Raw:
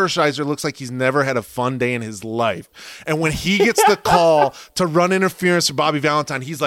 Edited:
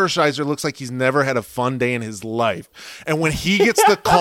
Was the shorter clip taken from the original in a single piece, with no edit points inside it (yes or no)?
yes